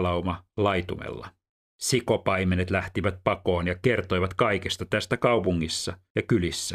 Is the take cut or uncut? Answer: cut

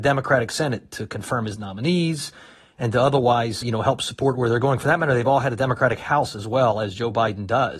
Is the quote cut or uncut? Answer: cut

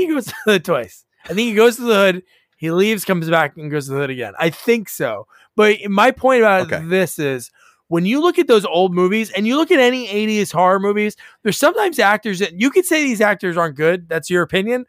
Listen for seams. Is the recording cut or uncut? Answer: uncut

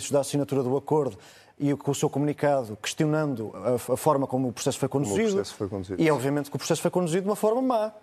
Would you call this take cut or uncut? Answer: uncut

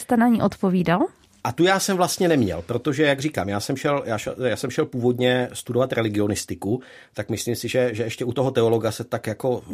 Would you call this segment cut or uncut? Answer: uncut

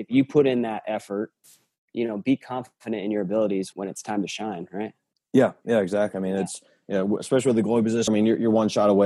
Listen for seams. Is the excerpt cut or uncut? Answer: cut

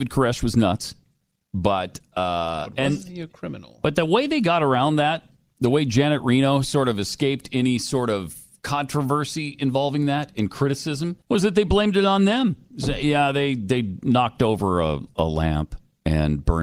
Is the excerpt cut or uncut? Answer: cut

